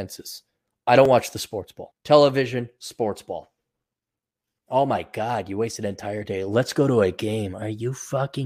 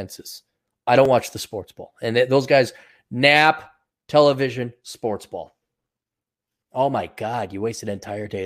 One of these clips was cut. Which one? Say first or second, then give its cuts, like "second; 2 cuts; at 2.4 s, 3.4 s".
first; 1 cut; at 1.9 s